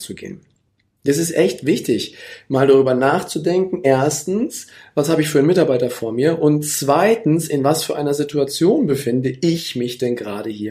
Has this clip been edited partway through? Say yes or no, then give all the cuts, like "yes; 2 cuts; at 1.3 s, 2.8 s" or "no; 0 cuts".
no; 0 cuts